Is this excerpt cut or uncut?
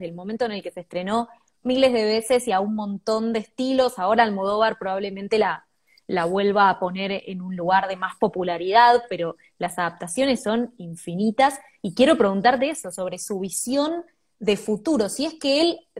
uncut